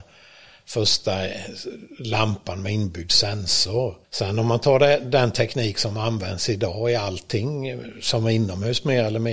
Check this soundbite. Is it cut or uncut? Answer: cut